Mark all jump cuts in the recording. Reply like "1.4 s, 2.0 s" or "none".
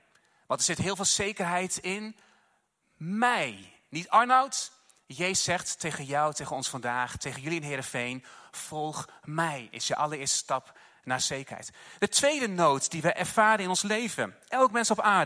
none